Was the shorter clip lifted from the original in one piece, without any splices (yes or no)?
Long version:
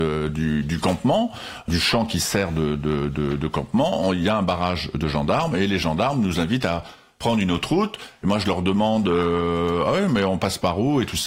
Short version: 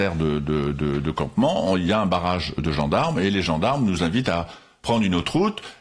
yes